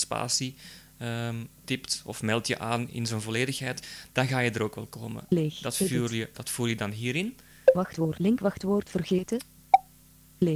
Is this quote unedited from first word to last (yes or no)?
no